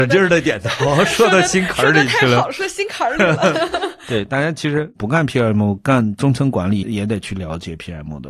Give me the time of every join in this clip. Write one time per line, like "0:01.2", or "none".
0:06.8